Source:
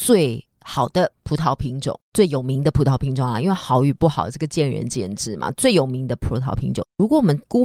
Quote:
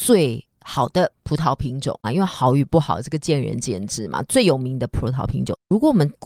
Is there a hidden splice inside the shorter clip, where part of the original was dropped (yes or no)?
yes